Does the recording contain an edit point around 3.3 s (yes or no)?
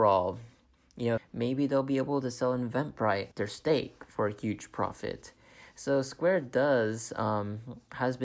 yes